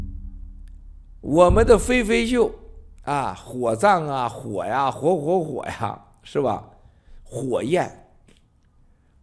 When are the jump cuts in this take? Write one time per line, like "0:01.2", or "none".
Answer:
none